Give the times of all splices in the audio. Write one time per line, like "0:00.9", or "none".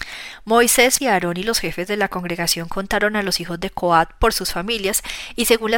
0:01.0